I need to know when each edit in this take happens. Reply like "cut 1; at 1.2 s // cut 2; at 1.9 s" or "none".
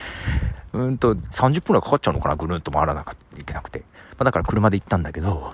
cut 1; at 1.3 s